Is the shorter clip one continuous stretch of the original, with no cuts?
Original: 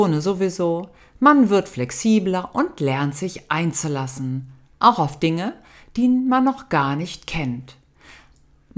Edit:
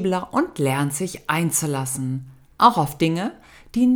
yes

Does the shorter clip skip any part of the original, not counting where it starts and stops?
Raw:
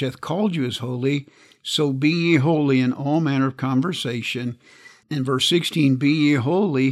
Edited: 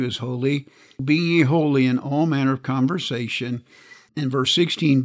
yes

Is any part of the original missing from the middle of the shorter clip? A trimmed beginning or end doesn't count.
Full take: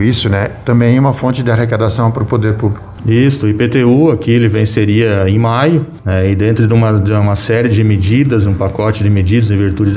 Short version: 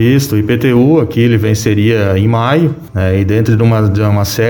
no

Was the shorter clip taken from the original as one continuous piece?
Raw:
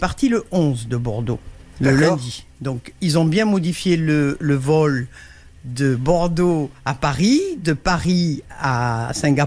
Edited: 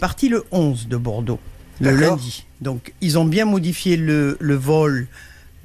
yes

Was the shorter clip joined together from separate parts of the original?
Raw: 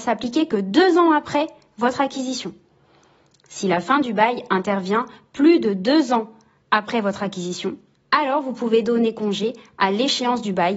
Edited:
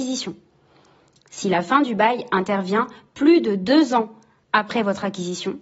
no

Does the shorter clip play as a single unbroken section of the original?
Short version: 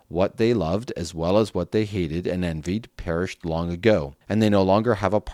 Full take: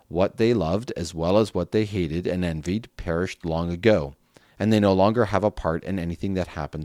no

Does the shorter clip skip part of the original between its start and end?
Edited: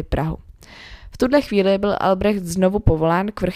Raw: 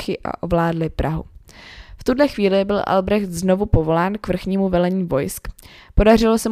no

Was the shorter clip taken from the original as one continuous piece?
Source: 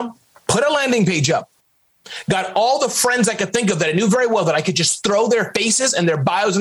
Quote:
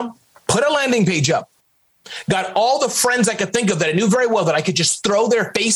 yes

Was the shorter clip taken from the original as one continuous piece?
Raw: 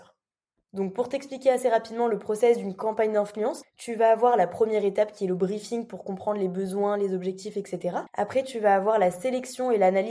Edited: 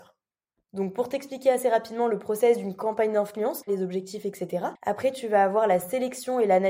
no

